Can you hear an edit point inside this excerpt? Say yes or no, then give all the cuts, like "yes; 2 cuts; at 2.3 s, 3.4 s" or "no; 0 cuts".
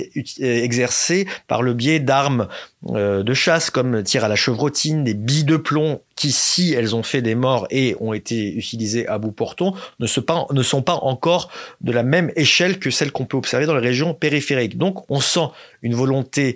no; 0 cuts